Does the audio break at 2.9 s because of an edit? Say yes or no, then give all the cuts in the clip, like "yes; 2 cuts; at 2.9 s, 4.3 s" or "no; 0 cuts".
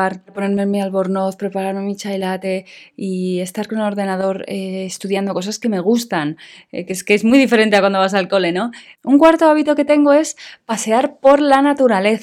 no; 1 cut; at 8.9 s